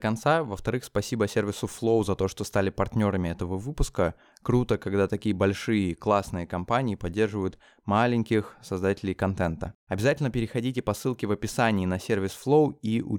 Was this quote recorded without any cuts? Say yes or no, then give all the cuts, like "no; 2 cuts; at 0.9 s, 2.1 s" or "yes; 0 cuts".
no; 1 cut; at 9.8 s